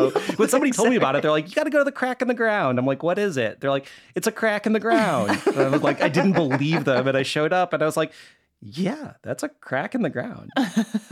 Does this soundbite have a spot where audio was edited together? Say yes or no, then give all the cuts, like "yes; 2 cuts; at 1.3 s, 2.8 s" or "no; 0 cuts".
no; 0 cuts